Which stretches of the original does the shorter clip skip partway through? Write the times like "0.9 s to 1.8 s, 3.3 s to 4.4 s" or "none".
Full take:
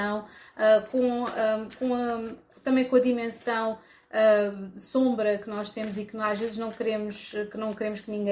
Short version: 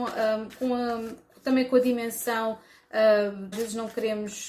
4.7 s to 6.3 s